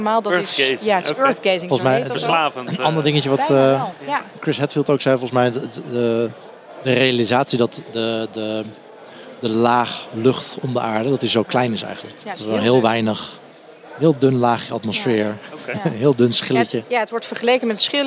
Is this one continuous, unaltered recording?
yes; 0 cuts

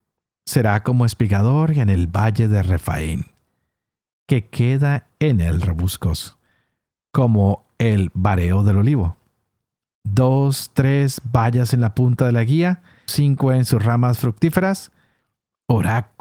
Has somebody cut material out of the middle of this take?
yes; 1 cut; at 13.1 s

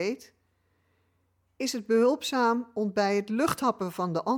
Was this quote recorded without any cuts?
yes; 0 cuts

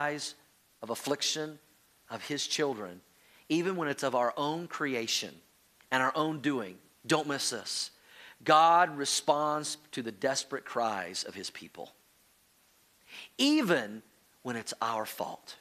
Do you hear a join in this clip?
yes; 1 cut; at 6.9 s

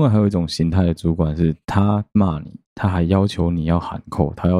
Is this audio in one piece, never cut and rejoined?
yes; 0 cuts

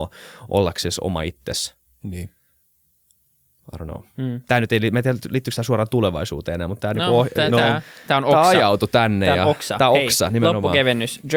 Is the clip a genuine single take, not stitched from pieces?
yes; 0 cuts

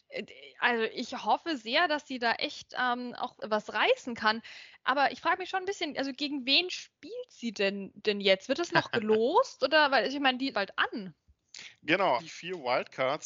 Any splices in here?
yes; 3 cuts; at 3.4 s, 10.5 s, 12.2 s

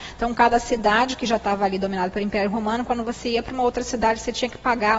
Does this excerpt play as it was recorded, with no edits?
yes; 0 cuts

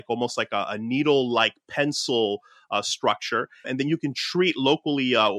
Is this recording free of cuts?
no; 1 cut; at 3.6 s

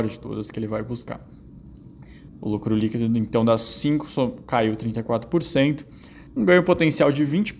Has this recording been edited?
yes; 2 cuts; at 2.3 s, 6.3 s

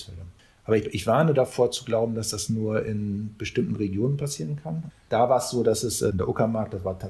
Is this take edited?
yes; 1 cut; at 4.9 s

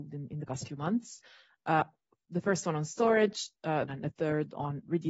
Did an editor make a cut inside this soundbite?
yes; 1 cut; at 3.9 s

